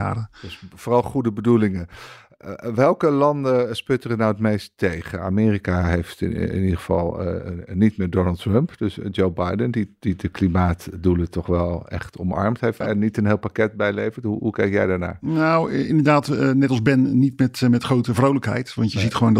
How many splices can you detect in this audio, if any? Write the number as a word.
one